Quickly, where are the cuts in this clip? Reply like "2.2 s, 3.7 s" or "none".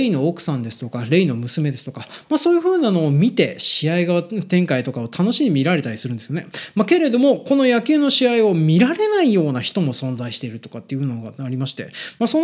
none